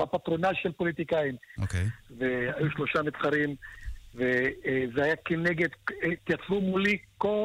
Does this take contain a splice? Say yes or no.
yes